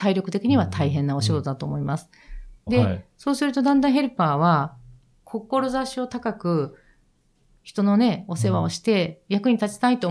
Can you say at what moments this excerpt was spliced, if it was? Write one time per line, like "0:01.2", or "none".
0:02.7